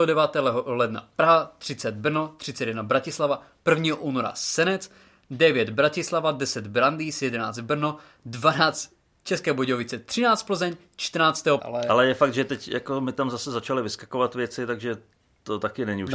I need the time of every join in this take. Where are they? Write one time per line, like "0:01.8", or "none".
0:11.6